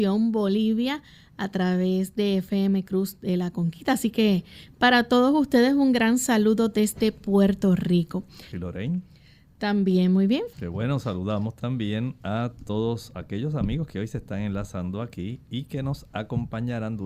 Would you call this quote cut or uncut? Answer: cut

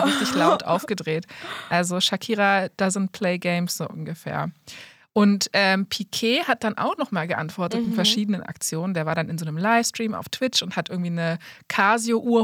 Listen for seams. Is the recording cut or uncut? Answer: uncut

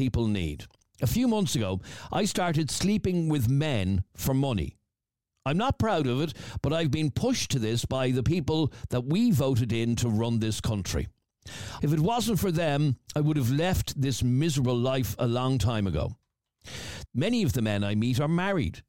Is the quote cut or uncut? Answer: cut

